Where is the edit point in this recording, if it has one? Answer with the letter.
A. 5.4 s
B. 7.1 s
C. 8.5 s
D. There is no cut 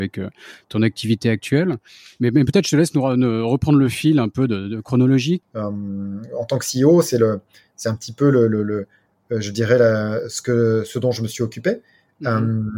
A